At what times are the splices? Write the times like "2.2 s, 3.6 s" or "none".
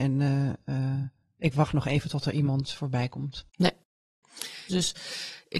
4.7 s